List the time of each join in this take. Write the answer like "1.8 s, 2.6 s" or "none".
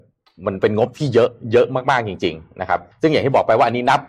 2.9 s